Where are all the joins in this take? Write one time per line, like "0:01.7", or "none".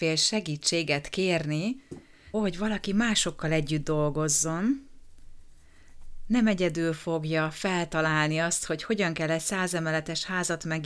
0:02.3